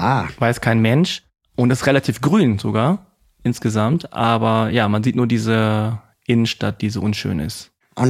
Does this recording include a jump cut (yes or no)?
no